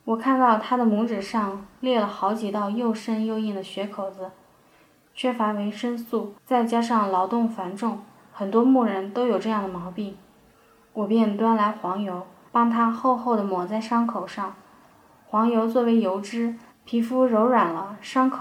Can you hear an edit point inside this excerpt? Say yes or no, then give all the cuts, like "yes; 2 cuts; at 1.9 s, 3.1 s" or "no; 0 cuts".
yes; 1 cut; at 16.7 s